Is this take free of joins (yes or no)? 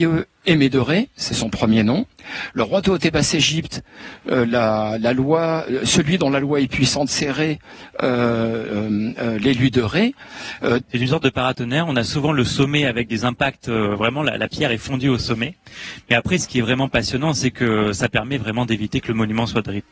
no